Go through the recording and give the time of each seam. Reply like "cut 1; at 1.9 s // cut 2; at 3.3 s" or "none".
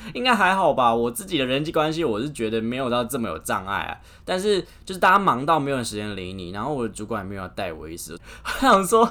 cut 1; at 8.2 s